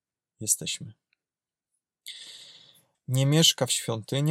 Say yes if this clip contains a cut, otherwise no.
yes